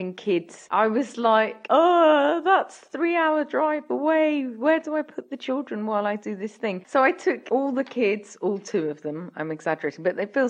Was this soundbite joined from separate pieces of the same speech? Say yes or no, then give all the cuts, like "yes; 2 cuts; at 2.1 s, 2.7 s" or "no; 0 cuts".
yes; 1 cut; at 6.8 s